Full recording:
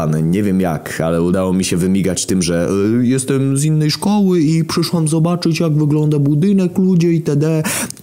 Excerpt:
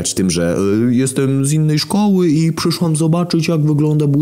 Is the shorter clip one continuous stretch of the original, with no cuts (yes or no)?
yes